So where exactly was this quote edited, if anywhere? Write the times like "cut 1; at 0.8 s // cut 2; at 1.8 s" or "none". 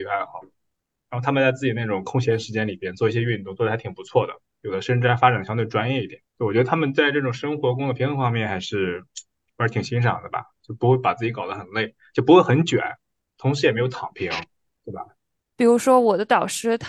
cut 1; at 6.3 s // cut 2; at 15.5 s